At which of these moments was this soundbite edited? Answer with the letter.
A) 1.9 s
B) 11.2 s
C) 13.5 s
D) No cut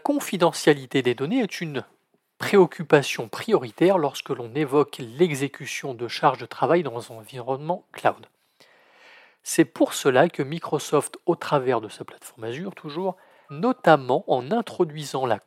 C